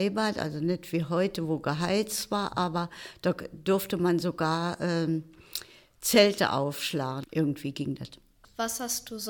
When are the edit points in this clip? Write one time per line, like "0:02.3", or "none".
0:07.2